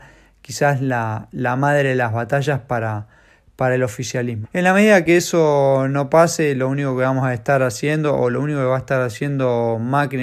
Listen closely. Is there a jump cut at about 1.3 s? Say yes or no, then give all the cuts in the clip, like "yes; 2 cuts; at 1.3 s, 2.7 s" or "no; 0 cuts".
no; 1 cut; at 4.4 s